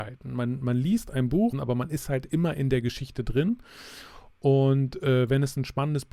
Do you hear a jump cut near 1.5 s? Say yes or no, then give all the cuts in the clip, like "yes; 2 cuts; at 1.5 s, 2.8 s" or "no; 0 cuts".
yes; 1 cut; at 1.5 s